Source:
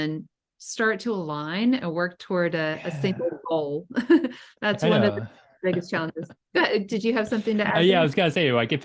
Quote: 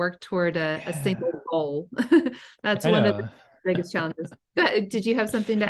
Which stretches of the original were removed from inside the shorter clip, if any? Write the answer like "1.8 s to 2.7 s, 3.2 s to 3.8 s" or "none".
none